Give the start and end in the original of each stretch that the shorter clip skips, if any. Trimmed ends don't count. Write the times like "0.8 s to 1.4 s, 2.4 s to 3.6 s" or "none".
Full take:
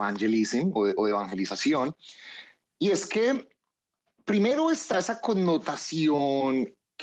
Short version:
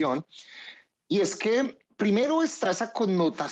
3.6 s to 4.1 s